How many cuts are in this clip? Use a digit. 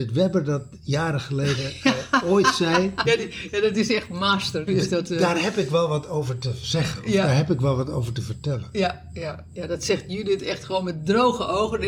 2